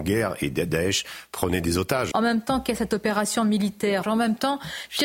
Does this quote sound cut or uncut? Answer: cut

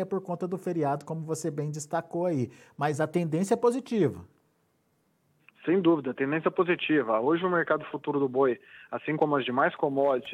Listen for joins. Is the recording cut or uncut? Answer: uncut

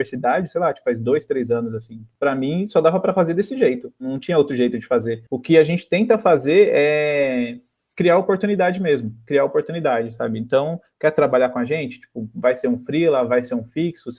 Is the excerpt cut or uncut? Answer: cut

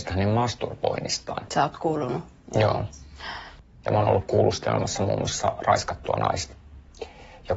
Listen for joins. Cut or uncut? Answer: cut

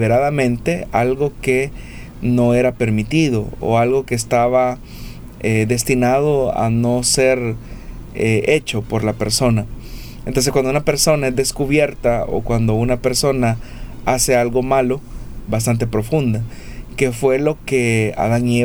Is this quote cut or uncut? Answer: cut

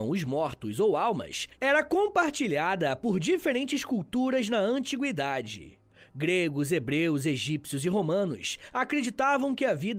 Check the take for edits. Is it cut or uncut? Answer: uncut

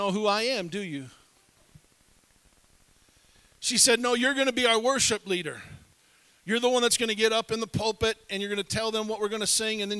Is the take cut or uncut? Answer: uncut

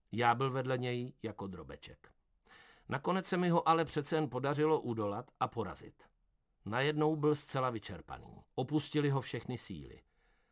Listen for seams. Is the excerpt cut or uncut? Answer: cut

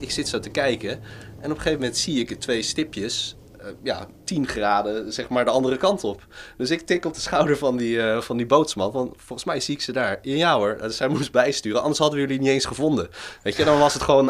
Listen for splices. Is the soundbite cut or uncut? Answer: uncut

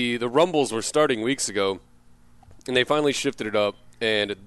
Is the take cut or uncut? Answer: uncut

